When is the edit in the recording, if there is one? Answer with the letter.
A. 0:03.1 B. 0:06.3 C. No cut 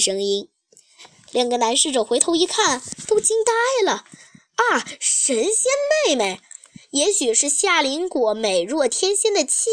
C